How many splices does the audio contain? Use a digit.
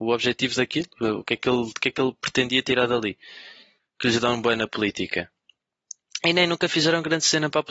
1